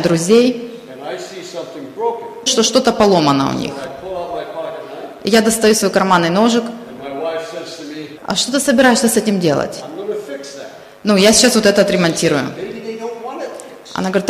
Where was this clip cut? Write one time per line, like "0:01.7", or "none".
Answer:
0:02.5
0:08.2